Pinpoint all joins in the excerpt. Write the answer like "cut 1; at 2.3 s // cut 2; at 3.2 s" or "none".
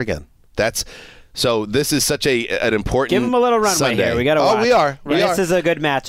none